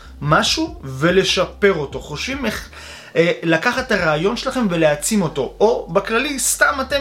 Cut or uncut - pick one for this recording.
uncut